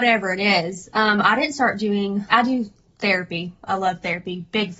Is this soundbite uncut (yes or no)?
no